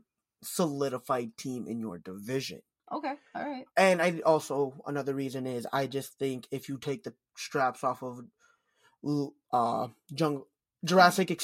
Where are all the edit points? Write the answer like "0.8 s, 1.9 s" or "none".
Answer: 3.7 s